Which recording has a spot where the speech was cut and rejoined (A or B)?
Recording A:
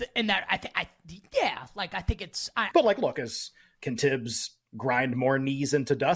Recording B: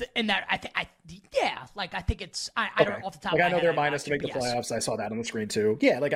A